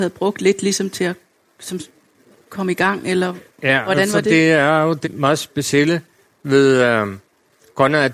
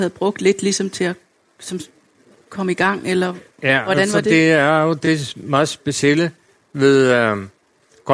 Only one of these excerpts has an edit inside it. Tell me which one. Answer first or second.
first